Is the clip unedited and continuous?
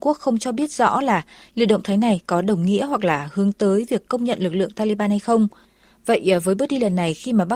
yes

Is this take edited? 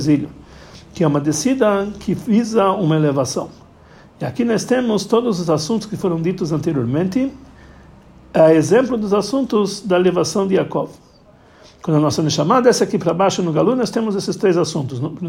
no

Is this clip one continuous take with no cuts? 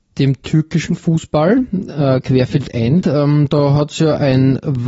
no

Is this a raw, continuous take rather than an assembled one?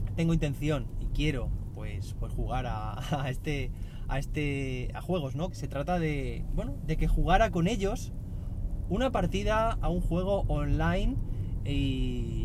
no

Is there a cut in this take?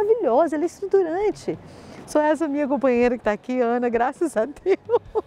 yes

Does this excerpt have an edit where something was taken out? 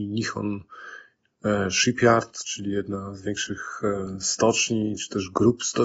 no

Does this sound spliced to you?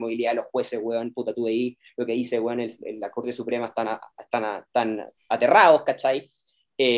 yes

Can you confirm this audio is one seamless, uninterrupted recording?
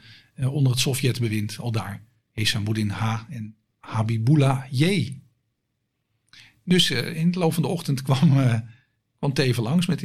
yes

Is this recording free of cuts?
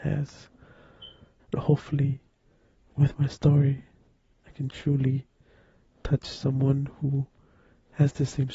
no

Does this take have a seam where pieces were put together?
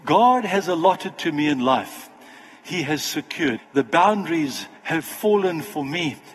yes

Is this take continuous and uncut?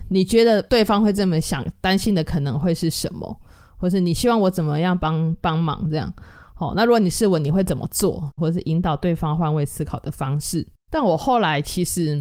no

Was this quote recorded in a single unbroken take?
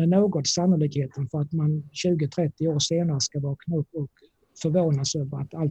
no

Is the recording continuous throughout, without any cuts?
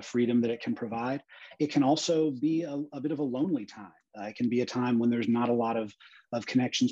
yes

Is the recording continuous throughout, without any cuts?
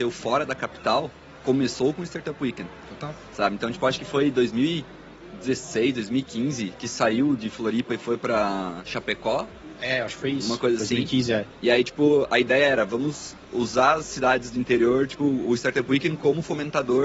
yes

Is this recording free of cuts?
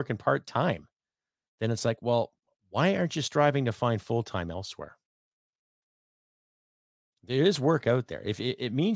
yes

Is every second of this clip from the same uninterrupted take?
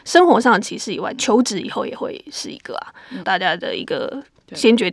no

